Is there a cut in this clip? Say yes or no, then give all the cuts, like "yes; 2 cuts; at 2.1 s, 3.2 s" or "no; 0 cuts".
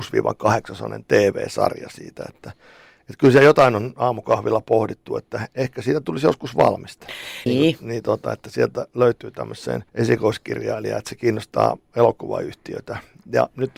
yes; 2 cuts; at 7.5 s, 9.9 s